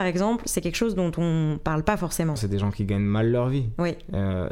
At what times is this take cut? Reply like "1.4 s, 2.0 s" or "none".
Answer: 2.4 s